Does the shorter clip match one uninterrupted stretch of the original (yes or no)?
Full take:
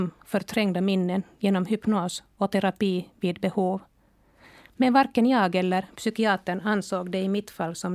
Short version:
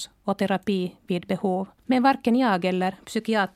no